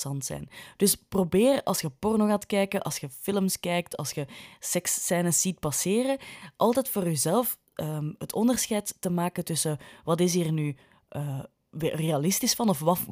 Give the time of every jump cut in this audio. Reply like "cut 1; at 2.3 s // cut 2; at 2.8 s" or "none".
none